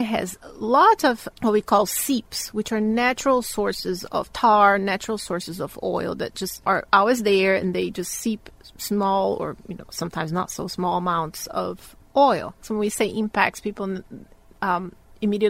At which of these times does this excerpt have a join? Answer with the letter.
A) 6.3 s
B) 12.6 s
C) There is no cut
B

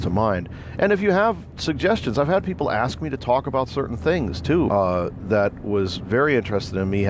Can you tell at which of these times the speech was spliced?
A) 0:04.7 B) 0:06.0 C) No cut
A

